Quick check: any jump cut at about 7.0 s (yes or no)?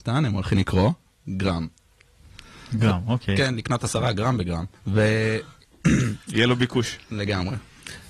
no